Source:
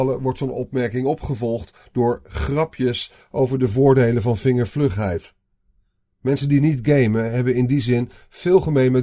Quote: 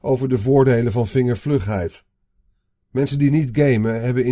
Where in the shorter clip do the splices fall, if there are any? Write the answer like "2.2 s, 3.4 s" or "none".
none